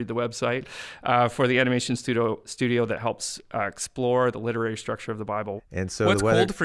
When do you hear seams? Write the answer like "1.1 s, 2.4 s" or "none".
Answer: 5.6 s